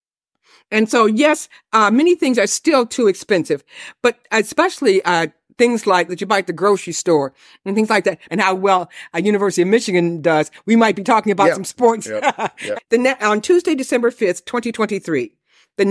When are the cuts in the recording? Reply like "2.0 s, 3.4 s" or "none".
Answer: 8.3 s, 12.7 s